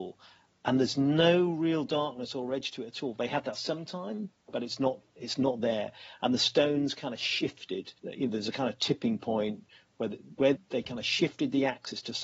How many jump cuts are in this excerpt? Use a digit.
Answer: 2